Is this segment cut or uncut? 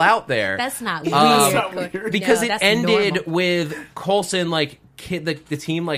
uncut